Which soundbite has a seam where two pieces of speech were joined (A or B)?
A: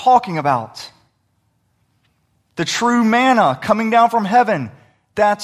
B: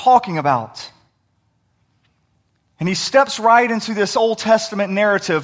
A